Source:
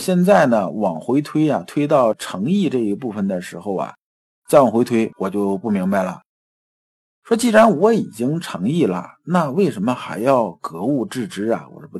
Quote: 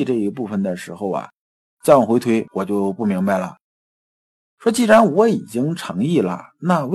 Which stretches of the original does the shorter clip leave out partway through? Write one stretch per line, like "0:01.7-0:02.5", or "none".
none